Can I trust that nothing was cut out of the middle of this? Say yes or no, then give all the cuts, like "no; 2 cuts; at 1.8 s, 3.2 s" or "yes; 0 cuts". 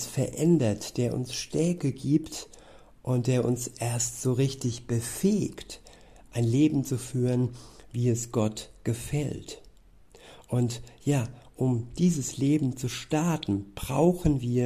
yes; 0 cuts